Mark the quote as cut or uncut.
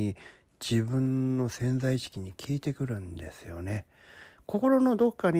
uncut